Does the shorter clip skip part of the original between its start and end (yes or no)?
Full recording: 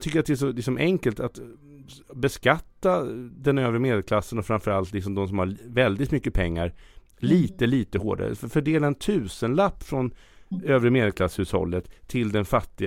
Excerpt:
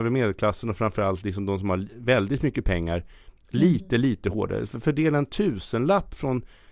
no